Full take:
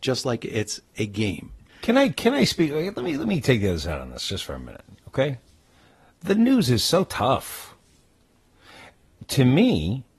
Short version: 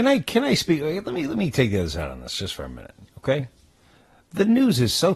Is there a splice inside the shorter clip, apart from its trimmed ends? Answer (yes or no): no